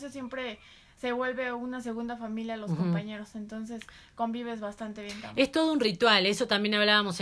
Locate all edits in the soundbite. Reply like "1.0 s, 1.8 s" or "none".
none